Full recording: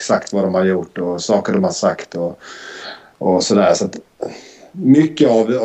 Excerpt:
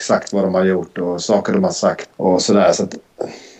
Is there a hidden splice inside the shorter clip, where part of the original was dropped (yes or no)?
yes